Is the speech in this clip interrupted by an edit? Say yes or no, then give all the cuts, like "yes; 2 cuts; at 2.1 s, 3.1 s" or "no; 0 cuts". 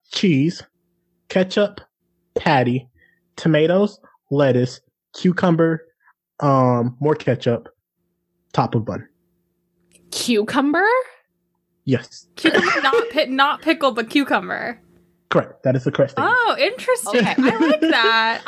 no; 0 cuts